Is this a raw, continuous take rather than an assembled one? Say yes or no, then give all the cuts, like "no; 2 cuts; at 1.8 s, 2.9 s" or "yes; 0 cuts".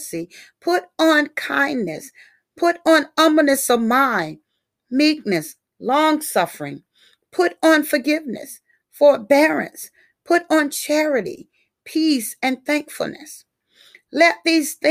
yes; 0 cuts